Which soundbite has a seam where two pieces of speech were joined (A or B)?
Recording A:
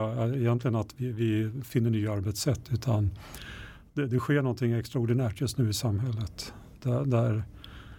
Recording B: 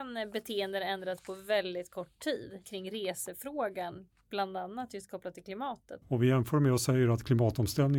B